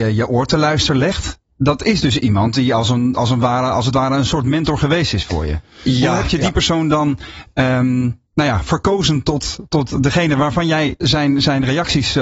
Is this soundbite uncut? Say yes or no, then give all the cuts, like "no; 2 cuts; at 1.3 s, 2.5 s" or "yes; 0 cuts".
no; 2 cuts; at 8.3 s, 11.0 s